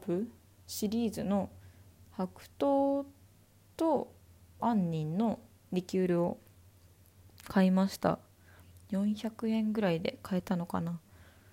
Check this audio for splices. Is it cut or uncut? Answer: cut